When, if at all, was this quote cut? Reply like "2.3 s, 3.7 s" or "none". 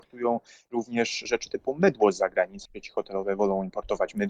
2.6 s